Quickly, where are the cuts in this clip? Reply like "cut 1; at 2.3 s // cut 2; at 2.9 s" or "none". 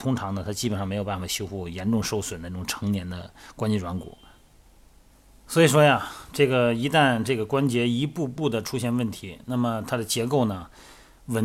none